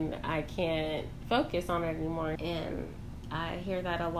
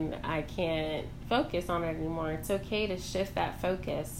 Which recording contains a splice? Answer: first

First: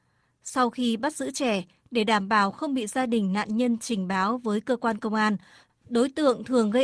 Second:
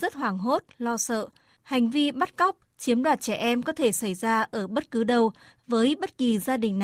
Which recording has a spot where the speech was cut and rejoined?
second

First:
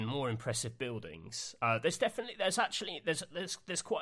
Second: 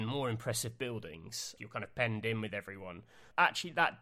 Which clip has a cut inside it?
second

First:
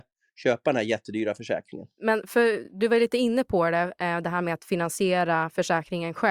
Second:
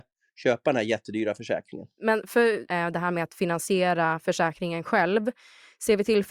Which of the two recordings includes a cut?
second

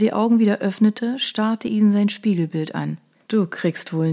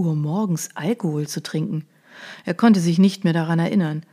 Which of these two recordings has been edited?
first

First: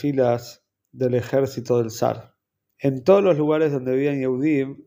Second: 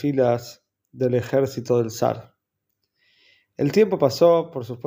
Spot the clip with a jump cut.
first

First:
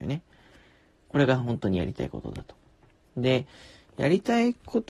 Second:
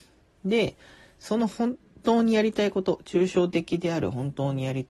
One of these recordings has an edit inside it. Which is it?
first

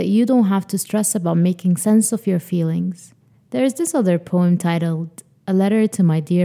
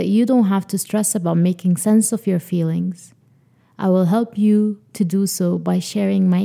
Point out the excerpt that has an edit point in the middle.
first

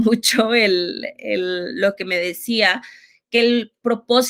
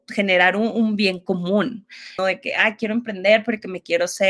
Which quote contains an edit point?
second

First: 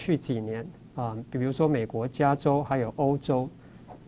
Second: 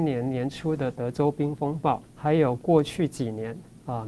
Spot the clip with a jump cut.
second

